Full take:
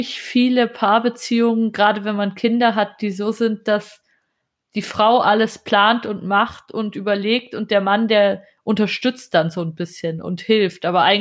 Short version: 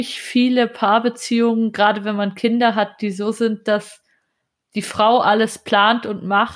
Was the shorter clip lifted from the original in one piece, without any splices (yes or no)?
yes